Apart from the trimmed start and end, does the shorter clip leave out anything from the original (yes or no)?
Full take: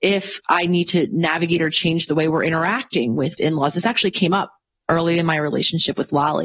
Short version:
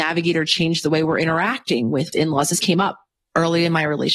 yes